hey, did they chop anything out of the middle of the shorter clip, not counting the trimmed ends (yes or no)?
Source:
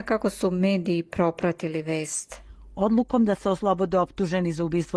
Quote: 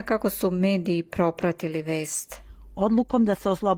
no